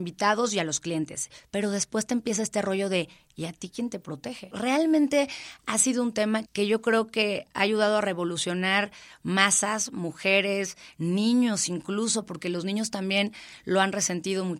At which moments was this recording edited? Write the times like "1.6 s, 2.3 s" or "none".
4.5 s, 6.5 s